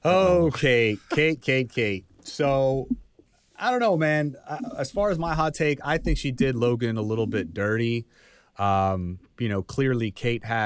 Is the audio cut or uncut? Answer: uncut